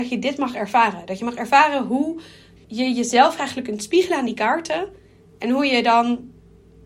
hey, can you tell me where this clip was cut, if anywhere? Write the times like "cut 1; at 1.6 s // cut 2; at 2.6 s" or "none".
cut 1; at 2.6 s